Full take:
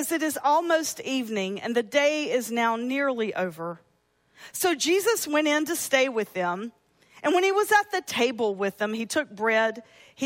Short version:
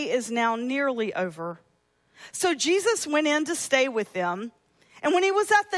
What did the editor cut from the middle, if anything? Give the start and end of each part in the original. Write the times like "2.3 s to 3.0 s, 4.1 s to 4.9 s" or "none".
none